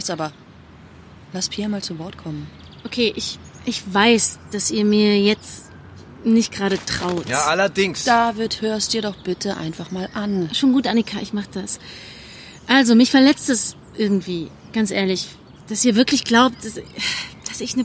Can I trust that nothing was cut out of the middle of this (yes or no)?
yes